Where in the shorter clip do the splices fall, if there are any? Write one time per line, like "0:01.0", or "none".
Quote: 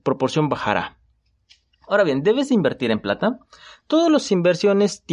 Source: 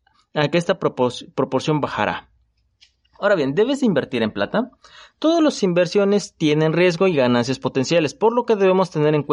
none